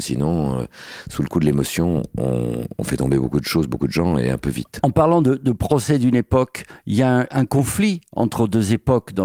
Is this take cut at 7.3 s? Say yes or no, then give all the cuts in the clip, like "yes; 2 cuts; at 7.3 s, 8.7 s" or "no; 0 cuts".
yes; 1 cut; at 7.3 s